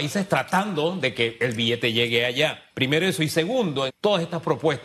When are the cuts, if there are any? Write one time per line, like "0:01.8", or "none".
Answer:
0:02.7
0:03.9